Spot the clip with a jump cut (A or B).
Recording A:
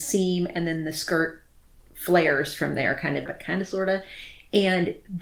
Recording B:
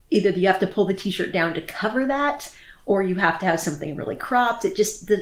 A